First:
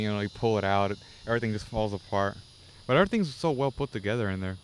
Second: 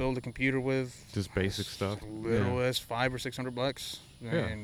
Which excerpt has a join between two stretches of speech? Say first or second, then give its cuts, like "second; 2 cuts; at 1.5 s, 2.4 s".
second; 1 cut; at 2.0 s